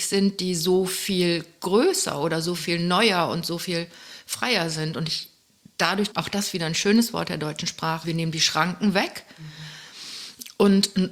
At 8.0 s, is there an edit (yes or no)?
yes